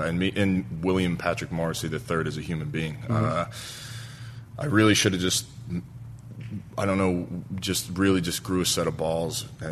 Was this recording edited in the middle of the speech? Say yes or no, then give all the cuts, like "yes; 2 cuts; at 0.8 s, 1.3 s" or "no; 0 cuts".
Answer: no; 0 cuts